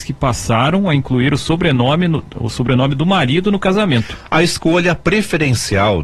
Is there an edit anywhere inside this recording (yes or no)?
no